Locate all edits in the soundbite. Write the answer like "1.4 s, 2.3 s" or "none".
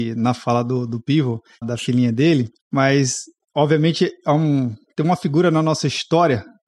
1.6 s